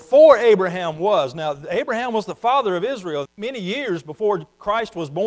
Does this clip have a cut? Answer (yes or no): yes